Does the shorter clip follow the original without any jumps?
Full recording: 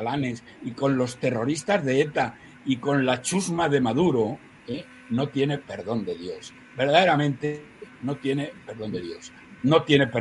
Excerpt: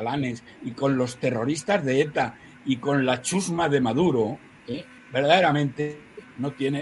no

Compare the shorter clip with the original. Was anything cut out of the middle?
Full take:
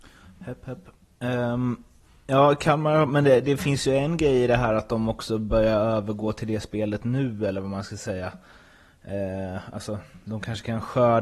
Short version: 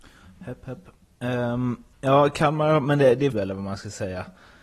yes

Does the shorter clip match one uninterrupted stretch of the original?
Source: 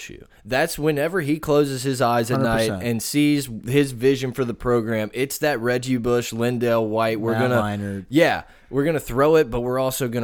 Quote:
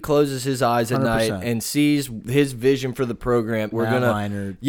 no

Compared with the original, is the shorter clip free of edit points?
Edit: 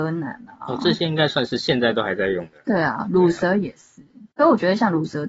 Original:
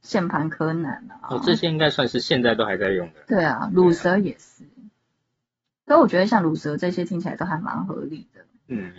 no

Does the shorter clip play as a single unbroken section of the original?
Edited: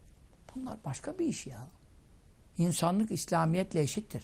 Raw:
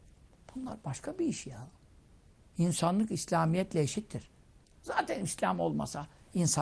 yes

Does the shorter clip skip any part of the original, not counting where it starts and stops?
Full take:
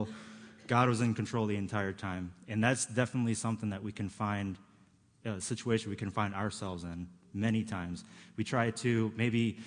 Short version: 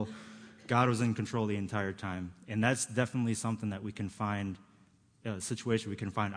no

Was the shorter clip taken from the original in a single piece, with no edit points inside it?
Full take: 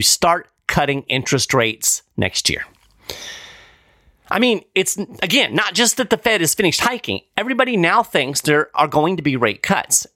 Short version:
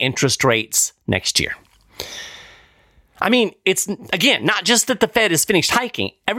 yes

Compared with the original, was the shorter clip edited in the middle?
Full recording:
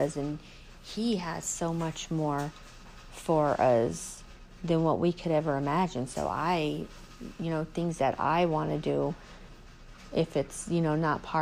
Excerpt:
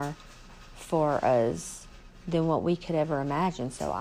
no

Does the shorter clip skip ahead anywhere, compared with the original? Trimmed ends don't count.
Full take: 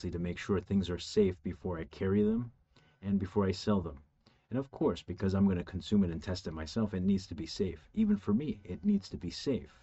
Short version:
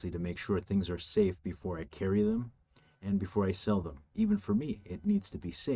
yes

